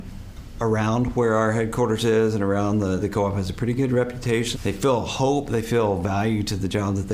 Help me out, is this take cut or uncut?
cut